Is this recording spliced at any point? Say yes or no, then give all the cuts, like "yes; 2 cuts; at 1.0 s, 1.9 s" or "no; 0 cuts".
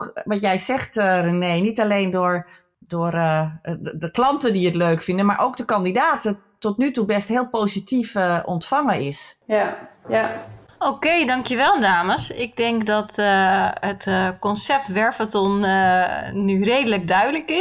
no; 0 cuts